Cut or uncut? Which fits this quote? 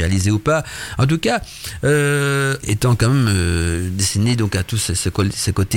cut